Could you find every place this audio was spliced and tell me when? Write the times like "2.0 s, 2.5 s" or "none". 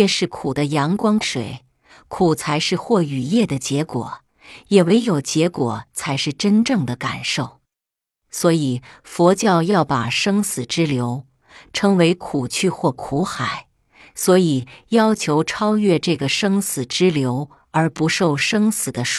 1.2 s